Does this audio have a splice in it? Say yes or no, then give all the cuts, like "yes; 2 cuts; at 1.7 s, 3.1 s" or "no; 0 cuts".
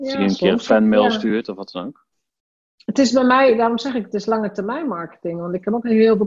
no; 0 cuts